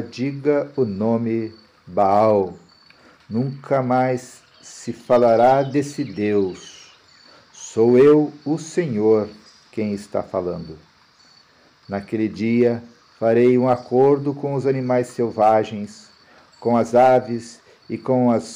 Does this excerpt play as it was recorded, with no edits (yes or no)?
yes